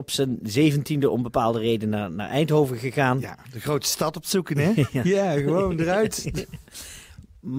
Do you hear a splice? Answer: no; 0 cuts

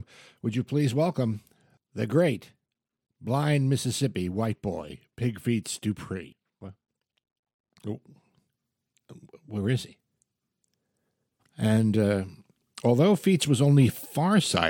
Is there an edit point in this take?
yes; 1 cut; at 11.4 s

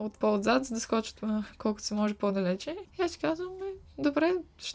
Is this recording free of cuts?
no; 1 cut; at 2.9 s

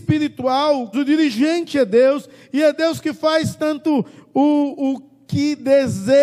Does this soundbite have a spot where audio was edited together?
yes; 1 cut; at 0.9 s

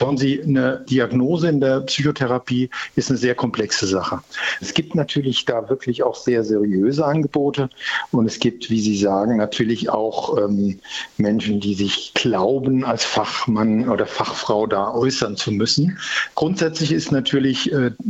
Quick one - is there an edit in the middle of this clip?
yes; 1 cut; at 4.6 s

